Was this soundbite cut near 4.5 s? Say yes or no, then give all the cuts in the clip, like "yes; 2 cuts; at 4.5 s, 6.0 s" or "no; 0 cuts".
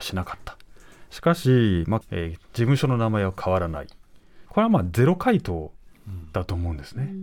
yes; 2 cuts; at 2.0 s, 4.5 s